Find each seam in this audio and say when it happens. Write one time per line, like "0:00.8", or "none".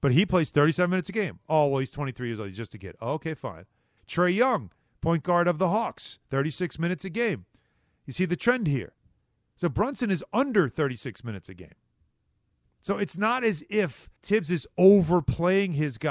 0:04.0
0:14.2